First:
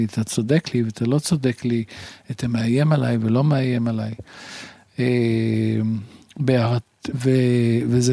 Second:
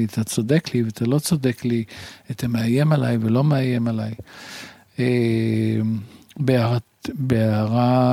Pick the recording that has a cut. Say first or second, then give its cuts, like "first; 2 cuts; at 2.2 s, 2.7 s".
first; 1 cut; at 7.1 s